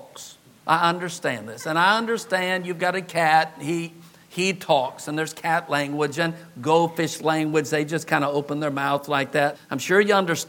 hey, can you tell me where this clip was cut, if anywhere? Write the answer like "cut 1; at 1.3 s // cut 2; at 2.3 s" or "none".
cut 1; at 9.5 s